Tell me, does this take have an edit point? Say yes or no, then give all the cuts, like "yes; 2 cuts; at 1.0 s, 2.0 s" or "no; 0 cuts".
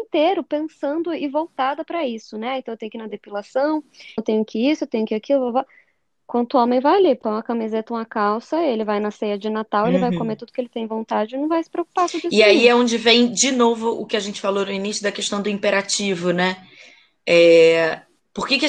yes; 1 cut; at 4.2 s